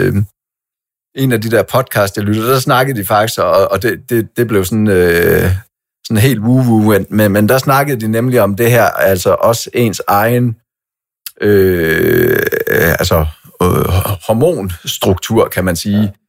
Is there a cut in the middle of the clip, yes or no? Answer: no